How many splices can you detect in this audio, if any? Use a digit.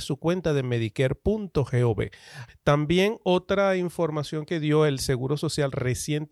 1